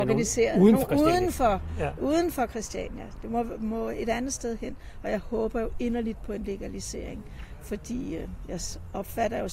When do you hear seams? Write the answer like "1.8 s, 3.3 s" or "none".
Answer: none